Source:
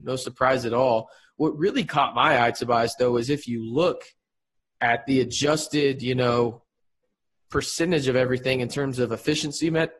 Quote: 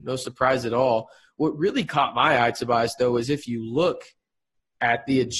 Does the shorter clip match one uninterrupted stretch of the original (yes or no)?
yes